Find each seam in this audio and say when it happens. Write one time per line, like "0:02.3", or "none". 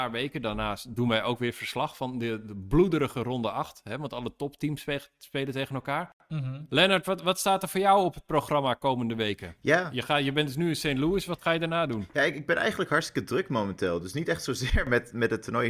none